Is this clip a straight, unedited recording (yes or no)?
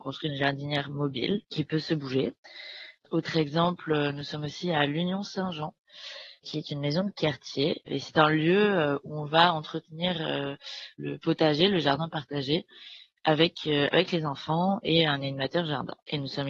no